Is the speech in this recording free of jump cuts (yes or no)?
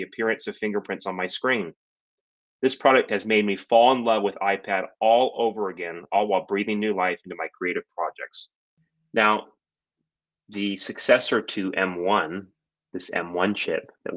yes